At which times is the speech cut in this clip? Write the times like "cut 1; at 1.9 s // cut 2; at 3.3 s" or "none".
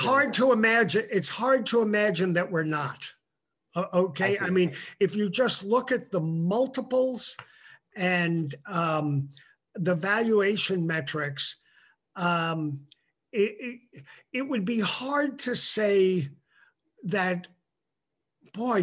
none